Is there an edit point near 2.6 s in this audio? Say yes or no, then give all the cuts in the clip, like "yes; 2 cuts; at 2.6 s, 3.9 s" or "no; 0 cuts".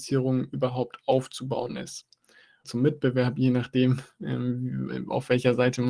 yes; 1 cut; at 2.6 s